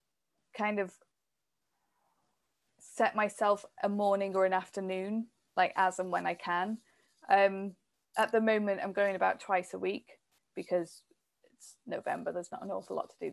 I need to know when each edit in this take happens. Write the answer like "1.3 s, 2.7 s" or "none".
10.4 s